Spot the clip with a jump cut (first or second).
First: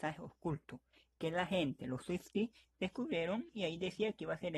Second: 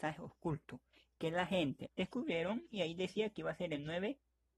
second